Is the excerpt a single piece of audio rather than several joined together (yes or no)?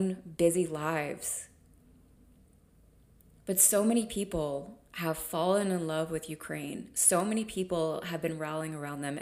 yes